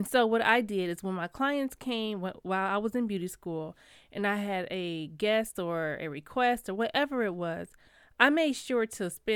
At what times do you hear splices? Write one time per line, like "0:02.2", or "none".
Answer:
none